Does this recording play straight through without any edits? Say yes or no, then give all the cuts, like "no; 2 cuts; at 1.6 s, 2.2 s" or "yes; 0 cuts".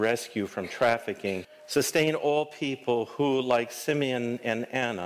no; 1 cut; at 1.4 s